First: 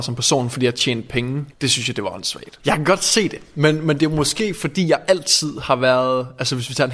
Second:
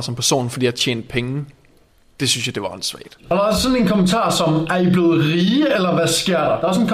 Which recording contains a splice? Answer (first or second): first